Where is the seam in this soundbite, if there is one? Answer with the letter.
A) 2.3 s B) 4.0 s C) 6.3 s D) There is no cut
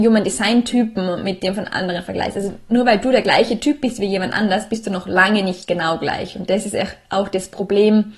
D